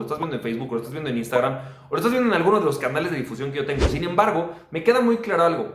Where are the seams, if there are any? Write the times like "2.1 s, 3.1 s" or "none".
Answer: none